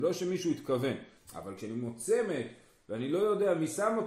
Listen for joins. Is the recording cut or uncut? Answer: cut